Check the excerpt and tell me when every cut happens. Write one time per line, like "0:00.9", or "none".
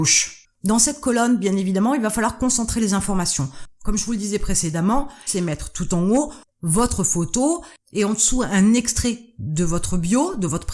0:05.3